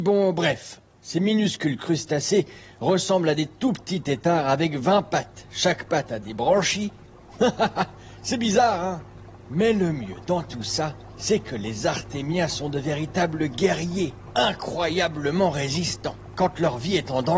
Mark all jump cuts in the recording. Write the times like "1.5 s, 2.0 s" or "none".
none

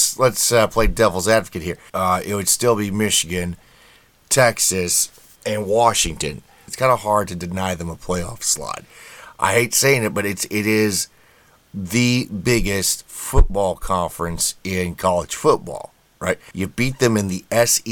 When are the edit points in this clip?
1.9 s, 6.7 s, 16.5 s

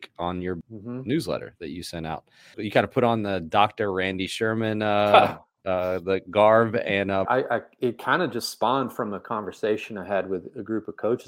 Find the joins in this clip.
7.3 s

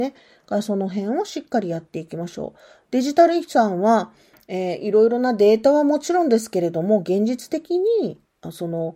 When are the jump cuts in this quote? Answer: none

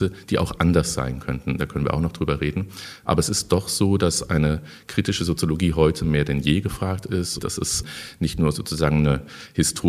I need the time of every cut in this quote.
1.6 s, 7.4 s

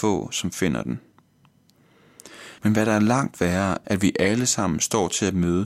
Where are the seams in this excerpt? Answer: 2.6 s, 3.8 s

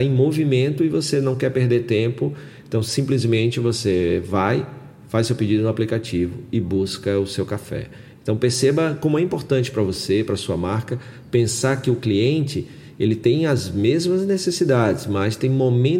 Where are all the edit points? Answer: none

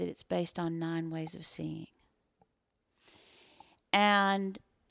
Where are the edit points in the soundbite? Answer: none

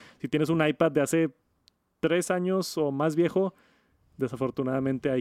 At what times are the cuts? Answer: none

